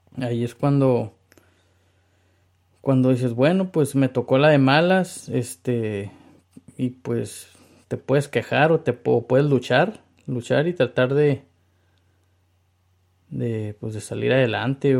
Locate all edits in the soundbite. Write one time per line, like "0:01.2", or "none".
0:07.8